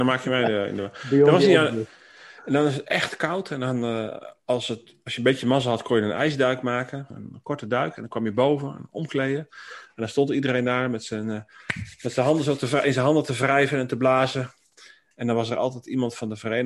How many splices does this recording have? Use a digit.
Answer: 1